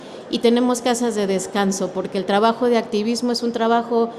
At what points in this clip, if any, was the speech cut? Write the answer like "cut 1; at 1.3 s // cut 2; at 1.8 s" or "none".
none